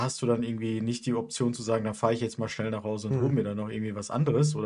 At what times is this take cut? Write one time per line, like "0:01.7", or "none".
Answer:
none

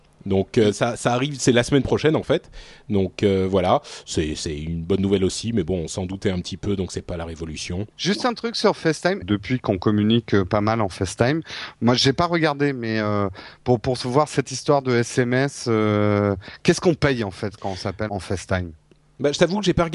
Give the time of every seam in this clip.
0:07.9
0:09.2
0:18.1

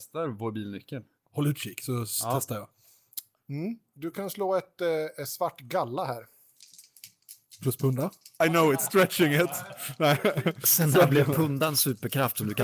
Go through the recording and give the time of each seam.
0:03.4

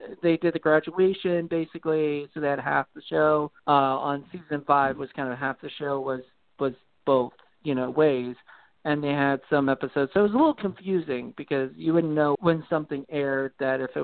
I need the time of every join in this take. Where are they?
0:03.6
0:12.4

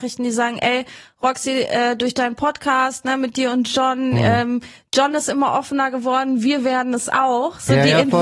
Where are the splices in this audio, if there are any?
none

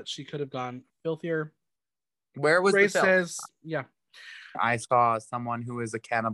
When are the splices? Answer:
0:04.5

